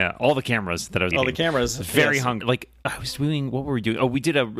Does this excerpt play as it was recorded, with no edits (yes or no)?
no